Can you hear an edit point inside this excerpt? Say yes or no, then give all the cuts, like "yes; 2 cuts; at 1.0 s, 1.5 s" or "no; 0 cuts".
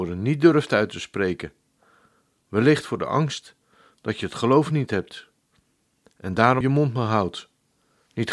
yes; 1 cut; at 6.6 s